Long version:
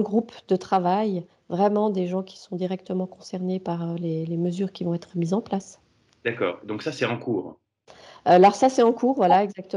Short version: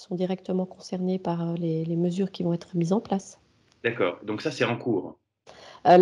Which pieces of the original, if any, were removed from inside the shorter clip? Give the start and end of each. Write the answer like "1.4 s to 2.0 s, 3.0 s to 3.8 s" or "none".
none